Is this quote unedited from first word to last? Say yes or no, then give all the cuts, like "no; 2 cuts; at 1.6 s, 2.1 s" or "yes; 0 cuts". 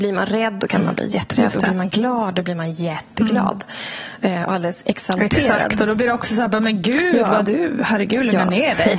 yes; 0 cuts